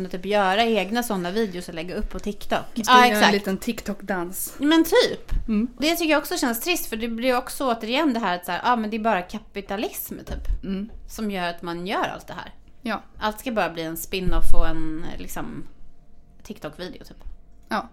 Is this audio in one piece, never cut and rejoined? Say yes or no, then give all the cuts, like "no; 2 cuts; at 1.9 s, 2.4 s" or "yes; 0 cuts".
no; 1 cut; at 5.8 s